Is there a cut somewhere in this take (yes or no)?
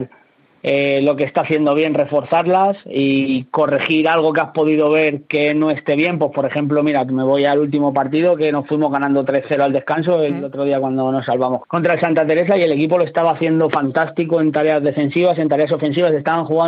yes